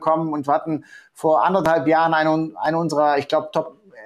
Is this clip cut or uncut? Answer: uncut